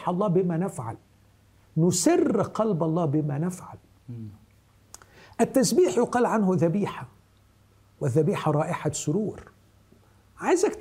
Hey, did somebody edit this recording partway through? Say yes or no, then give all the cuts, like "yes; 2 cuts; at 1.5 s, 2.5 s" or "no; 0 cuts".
no; 0 cuts